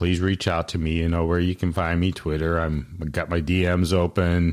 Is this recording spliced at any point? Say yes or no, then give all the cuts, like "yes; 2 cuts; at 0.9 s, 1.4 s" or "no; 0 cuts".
no; 0 cuts